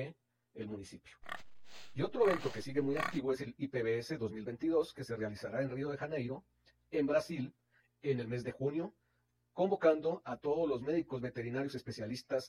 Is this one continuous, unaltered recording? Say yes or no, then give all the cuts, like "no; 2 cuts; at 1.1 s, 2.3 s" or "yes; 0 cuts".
yes; 0 cuts